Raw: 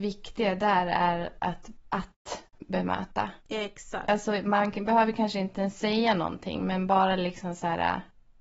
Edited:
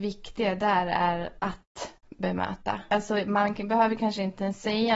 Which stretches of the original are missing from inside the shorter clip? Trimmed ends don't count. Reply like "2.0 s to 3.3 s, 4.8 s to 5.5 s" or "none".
1.4 s to 1.9 s, 3.4 s to 4.1 s